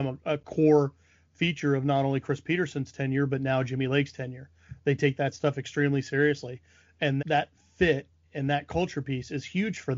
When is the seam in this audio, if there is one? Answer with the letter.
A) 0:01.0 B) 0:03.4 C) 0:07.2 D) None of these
C